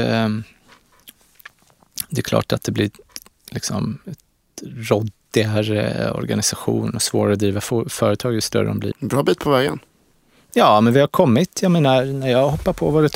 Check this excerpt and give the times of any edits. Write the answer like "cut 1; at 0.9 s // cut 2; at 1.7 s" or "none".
cut 1; at 8.9 s